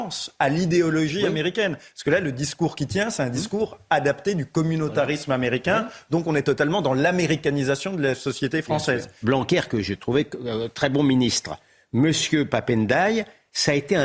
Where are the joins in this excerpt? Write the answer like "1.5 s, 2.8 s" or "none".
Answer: 9.2 s

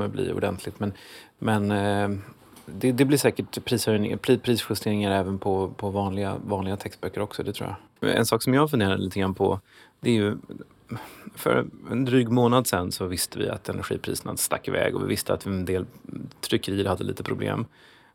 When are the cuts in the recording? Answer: 8.0 s

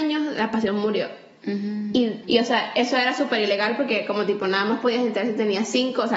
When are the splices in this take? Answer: 2.2 s

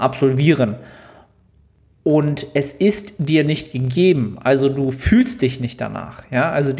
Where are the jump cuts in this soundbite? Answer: none

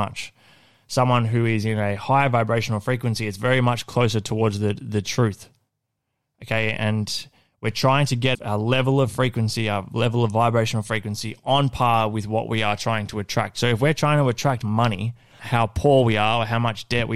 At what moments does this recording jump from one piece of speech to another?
8.3 s, 15.4 s

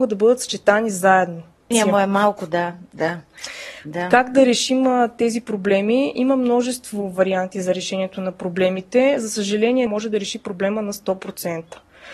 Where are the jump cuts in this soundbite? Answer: 1.7 s, 9.9 s

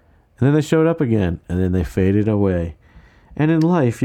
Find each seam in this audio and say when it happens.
none

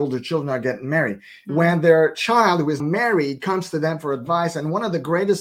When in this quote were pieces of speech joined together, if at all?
1.5 s, 2.8 s

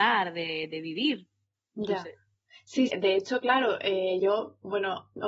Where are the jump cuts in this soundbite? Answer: 2.9 s, 4.2 s

